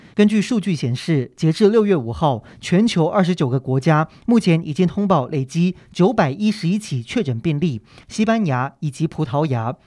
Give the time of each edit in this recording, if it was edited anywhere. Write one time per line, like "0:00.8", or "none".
0:08.0